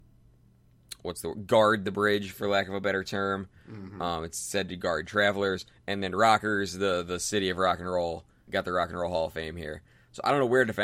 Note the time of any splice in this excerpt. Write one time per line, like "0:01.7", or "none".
0:08.5